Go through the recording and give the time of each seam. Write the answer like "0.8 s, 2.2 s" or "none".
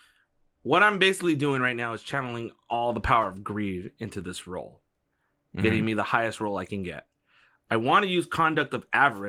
none